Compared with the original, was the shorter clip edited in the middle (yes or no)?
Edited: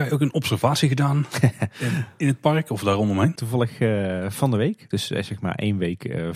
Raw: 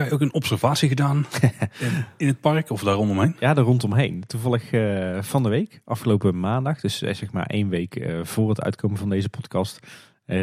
yes